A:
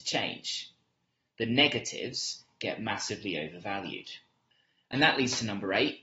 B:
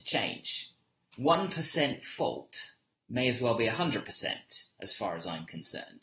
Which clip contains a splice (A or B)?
B